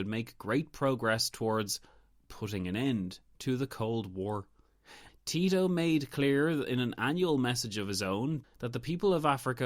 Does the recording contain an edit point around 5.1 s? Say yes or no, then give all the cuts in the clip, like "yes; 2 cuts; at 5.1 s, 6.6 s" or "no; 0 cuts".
yes; 2 cuts; at 5.1 s, 8.4 s